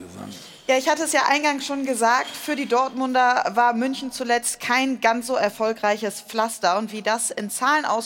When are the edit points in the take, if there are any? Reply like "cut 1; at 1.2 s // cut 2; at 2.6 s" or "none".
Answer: none